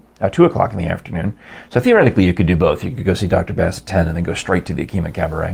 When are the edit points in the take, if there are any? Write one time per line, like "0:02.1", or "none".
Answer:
none